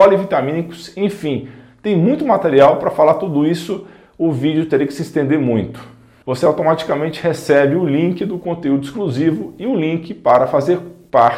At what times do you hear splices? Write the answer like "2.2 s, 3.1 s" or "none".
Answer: 6.2 s